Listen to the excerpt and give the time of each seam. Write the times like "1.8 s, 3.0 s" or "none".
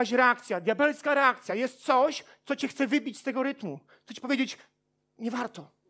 none